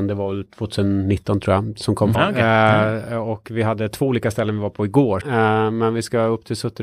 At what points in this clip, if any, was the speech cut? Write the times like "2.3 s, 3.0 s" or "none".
2.1 s, 5.2 s